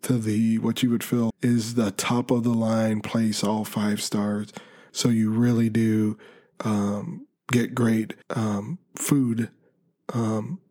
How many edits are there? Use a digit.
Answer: 3